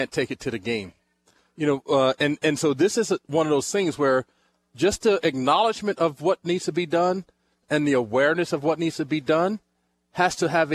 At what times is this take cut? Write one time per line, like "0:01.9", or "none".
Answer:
none